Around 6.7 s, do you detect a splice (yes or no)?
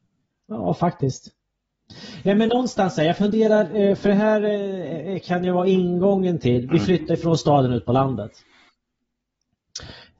yes